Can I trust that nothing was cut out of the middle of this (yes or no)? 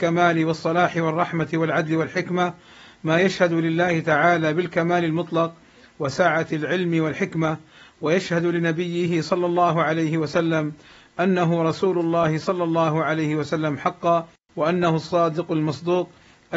yes